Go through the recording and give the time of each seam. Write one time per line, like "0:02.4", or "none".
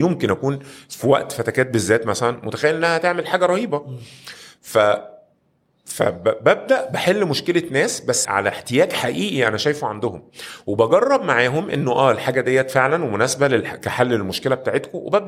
0:08.3